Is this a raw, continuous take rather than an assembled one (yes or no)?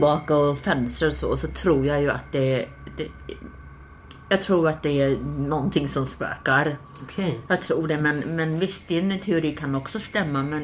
yes